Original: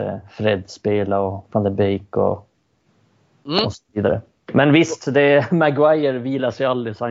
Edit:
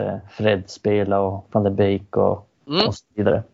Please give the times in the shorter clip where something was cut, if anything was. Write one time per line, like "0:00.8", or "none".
0:02.6